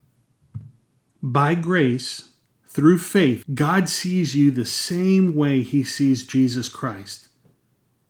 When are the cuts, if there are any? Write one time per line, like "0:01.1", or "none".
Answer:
0:03.4